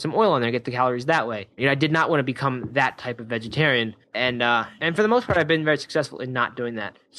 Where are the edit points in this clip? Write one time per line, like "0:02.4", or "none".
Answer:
0:01.6